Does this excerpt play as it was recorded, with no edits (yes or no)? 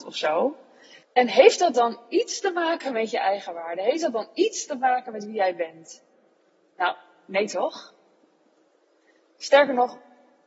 no